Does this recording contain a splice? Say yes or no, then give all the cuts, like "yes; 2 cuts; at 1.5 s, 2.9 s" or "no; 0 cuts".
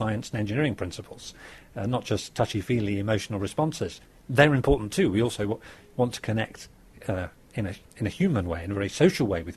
no; 0 cuts